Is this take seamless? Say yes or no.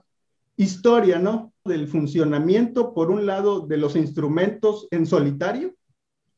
no